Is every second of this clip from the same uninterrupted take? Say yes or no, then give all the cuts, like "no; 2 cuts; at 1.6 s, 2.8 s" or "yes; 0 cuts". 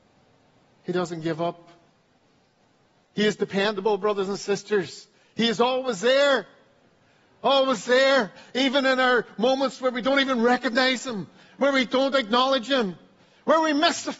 yes; 0 cuts